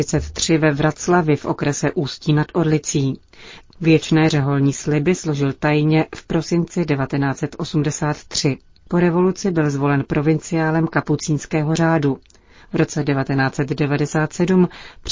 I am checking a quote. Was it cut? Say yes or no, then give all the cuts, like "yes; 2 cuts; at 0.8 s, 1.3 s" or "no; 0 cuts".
yes; 1 cut; at 3.6 s